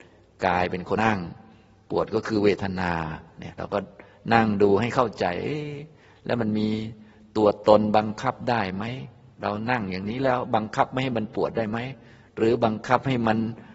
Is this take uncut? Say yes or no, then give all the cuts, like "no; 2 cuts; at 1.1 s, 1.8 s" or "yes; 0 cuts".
no; 1 cut; at 1.0 s